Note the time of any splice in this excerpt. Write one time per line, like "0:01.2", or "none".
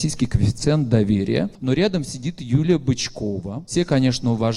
none